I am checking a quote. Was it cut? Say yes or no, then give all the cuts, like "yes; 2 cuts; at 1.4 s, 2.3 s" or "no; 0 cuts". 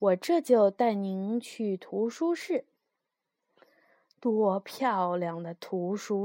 no; 0 cuts